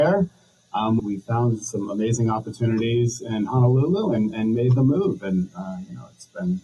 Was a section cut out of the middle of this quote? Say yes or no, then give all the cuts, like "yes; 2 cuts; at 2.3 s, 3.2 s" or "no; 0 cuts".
yes; 1 cut; at 1.0 s